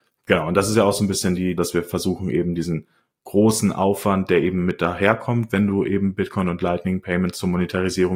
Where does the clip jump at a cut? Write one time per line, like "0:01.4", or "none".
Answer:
0:01.6